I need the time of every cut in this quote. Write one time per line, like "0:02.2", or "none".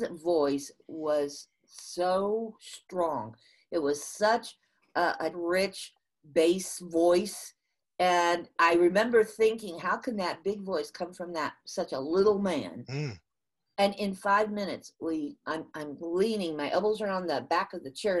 0:05.3
0:08.6